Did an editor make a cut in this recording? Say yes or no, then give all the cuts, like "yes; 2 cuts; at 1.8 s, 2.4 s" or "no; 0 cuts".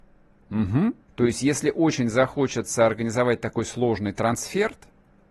yes; 1 cut; at 1.1 s